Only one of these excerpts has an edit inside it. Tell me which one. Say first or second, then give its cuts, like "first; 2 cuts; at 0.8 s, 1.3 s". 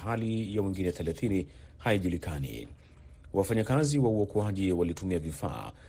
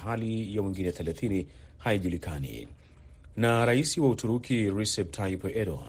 second; 1 cut; at 3.3 s